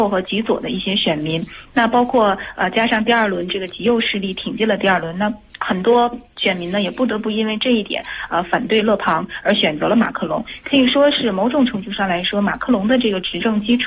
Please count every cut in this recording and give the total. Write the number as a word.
zero